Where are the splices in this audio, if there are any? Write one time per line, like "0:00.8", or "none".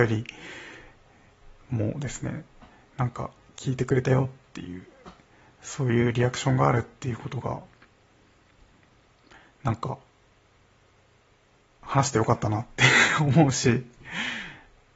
none